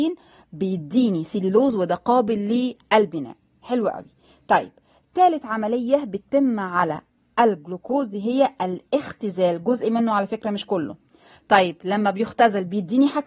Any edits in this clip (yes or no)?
no